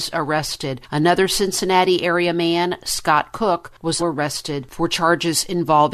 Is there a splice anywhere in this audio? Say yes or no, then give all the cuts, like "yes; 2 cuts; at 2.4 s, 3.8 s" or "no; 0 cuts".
yes; 1 cut; at 4.0 s